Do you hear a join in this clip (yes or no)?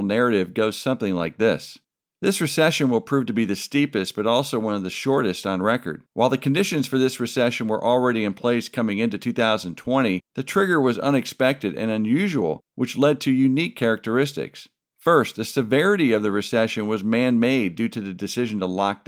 no